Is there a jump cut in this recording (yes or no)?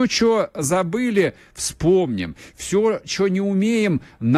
no